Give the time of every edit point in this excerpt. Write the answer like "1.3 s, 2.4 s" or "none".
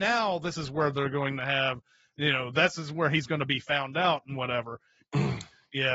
5.0 s